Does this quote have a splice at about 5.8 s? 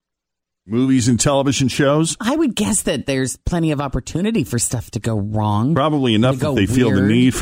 no; 0 cuts

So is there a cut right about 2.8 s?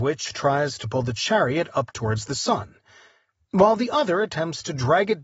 no; 0 cuts

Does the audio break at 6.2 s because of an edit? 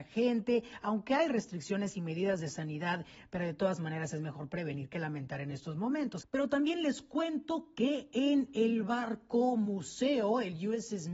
yes; 1 cut; at 6.2 s

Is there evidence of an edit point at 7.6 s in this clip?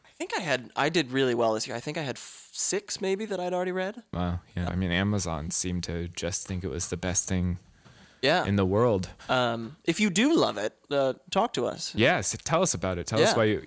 no; 1 cut; at 4.7 s

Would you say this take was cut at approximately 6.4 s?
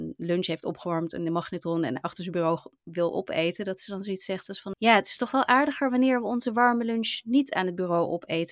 no; 1 cut; at 4.7 s

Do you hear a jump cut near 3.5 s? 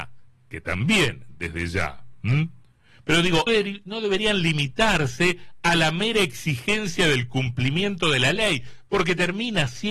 yes; 1 cut; at 3.5 s

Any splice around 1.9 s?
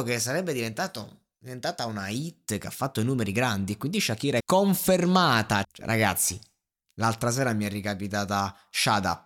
no; 2 cuts; at 4.4 s, 5.6 s

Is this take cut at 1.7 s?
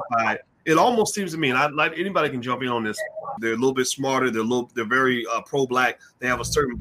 no; 1 cut; at 3.4 s

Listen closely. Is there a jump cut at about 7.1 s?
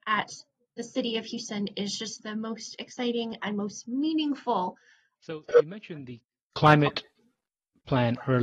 no; 1 cut; at 5.2 s

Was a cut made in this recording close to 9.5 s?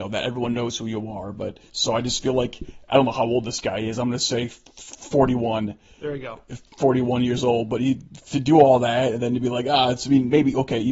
no; 1 cut; at 1.7 s

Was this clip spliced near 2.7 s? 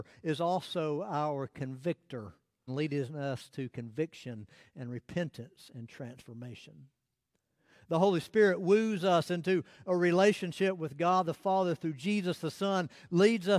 yes; 1 cut; at 2.7 s

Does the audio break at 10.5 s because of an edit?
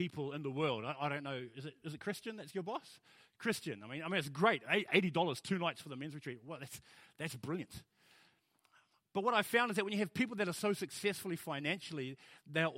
no; 0 cuts

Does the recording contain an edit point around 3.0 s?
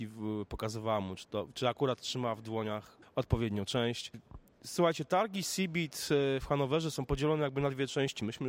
yes; 1 cut; at 3.0 s

